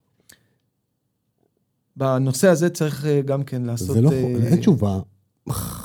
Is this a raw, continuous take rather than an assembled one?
yes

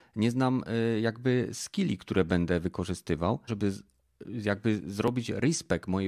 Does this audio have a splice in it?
yes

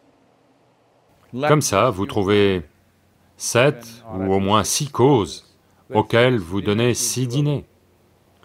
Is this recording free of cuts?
yes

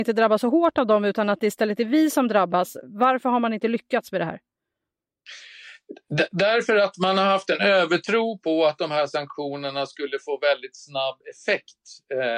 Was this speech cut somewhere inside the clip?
no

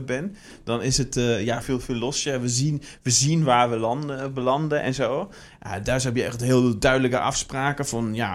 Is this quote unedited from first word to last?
no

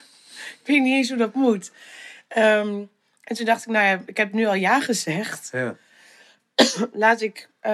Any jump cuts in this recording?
no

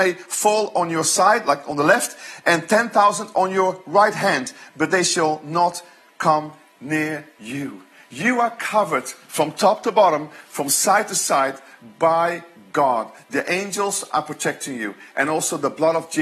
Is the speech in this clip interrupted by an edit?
no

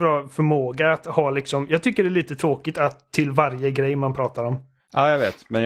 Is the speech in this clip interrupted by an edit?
no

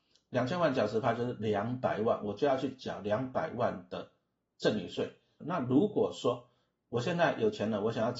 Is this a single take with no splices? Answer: no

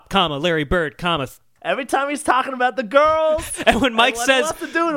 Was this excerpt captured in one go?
no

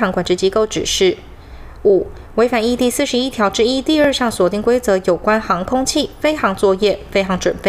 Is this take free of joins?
yes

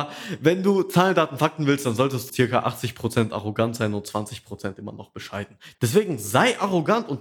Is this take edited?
yes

